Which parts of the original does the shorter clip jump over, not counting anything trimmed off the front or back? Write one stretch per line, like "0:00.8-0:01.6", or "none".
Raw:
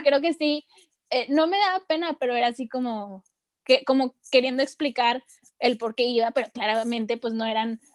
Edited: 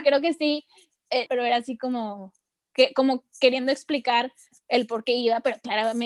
0:01.3-0:02.2